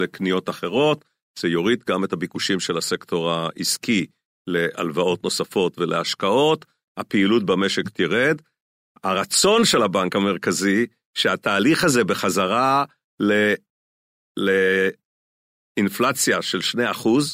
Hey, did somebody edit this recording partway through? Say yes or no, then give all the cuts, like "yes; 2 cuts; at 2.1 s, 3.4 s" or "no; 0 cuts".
no; 0 cuts